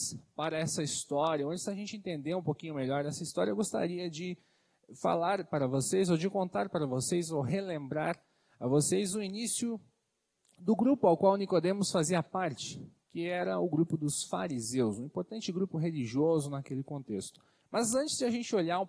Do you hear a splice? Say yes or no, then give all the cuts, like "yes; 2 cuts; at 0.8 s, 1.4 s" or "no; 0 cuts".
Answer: yes; 1 cut; at 17.6 s